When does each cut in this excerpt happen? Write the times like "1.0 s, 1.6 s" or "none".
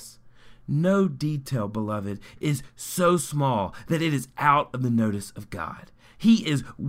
none